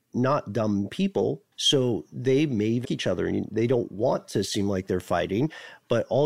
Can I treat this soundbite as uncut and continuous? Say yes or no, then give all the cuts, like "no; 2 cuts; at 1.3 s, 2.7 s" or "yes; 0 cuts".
no; 2 cuts; at 1.5 s, 2.8 s